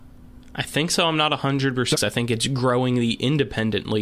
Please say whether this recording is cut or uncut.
cut